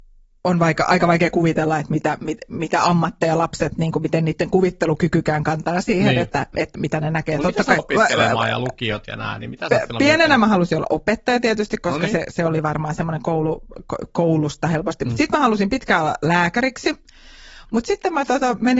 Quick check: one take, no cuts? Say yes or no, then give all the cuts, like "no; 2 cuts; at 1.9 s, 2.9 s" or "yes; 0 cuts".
no; 1 cut; at 7.8 s